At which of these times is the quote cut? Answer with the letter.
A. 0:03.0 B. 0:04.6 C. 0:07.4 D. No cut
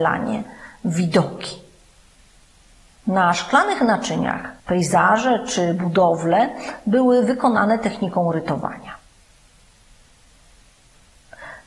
B